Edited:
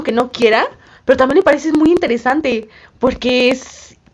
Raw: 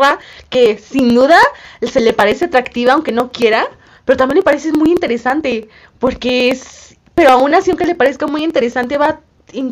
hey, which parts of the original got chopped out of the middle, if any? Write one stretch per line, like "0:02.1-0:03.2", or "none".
none